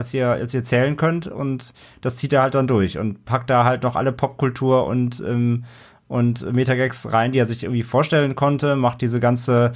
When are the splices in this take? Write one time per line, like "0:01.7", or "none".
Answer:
none